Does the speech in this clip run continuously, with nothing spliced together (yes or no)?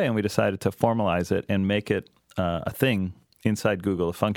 yes